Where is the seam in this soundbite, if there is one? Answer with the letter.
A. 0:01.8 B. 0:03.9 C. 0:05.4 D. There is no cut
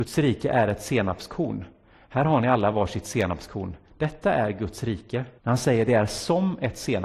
C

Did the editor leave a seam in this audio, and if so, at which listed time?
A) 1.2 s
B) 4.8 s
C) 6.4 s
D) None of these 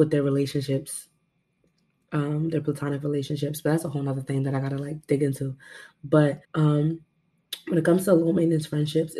C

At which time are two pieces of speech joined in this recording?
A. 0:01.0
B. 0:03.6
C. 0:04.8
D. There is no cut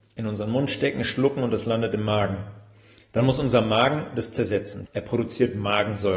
C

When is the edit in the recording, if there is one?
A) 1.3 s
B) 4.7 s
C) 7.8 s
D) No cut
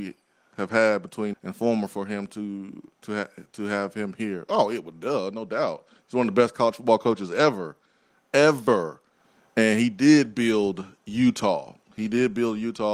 A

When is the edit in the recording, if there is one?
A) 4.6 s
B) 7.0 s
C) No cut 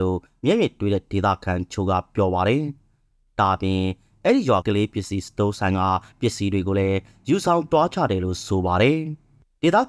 A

